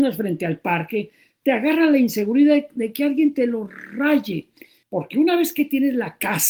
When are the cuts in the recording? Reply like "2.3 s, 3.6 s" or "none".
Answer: 4.8 s

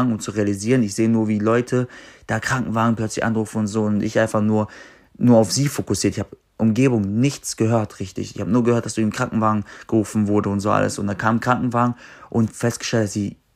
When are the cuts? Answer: none

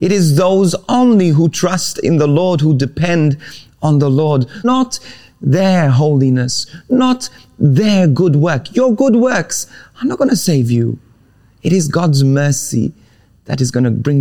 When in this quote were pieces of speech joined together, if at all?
4.6 s

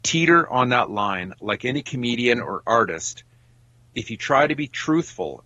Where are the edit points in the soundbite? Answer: none

